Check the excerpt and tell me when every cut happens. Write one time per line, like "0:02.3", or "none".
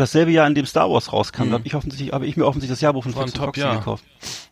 none